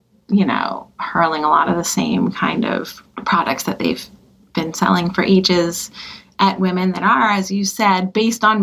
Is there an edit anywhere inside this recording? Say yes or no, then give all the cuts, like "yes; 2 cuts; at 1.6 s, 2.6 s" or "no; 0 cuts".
no; 0 cuts